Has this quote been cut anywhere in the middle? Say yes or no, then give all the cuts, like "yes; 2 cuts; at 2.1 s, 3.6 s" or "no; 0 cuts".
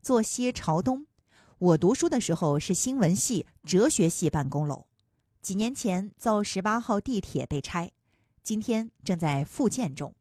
no; 0 cuts